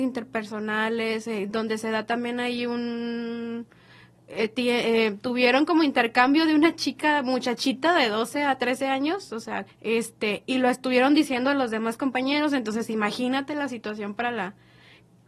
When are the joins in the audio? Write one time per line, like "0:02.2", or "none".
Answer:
0:09.7